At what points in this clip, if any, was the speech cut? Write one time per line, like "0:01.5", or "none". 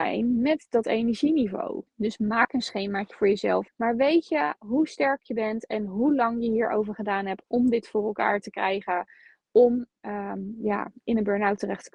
0:01.9
0:03.7